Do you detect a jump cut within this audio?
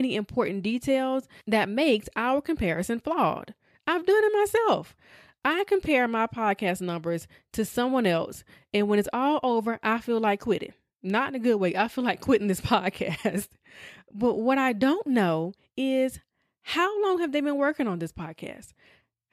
no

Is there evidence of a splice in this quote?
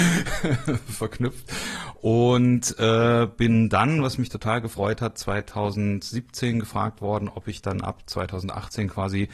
no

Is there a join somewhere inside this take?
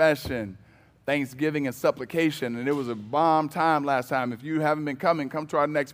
no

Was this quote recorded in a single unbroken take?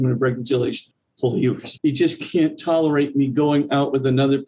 no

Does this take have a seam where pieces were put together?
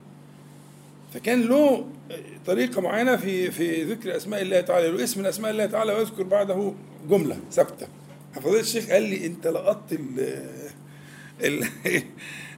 yes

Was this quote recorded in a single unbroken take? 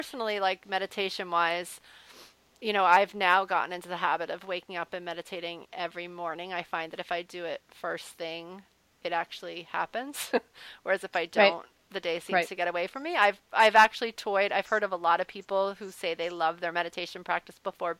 yes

